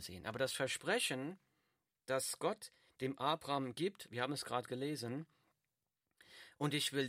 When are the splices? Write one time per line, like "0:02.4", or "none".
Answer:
0:04.1

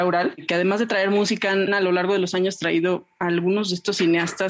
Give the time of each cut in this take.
0:01.7

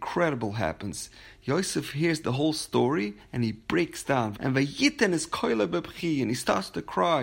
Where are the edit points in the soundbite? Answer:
0:04.3

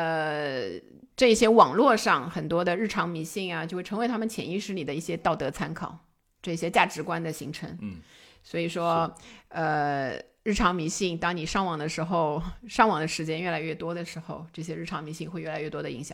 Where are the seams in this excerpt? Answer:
none

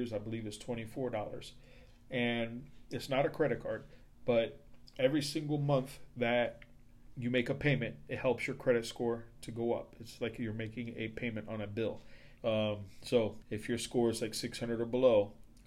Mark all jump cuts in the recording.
0:12.4
0:13.4

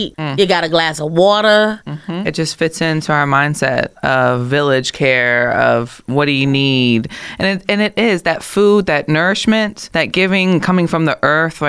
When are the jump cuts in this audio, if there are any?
0:02.2

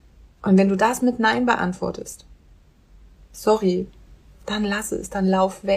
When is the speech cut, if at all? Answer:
none

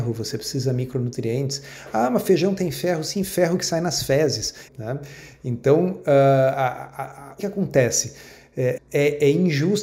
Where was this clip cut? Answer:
0:04.7
0:07.4
0:08.8

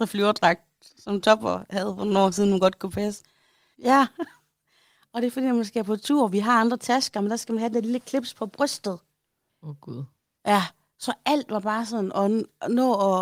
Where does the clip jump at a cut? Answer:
0:03.7
0:09.5

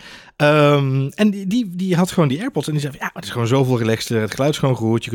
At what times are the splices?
none

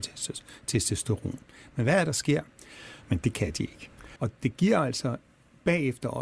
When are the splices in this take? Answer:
0:03.0
0:04.2

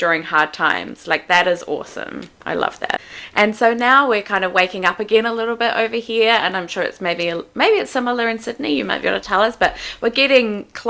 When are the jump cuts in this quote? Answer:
none

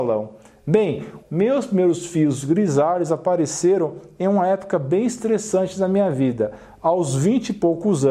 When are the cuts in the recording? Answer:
0:01.2

